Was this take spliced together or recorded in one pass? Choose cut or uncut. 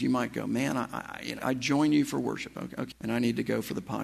cut